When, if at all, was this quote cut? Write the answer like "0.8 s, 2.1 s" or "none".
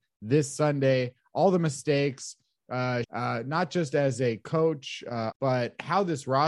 3.0 s, 5.3 s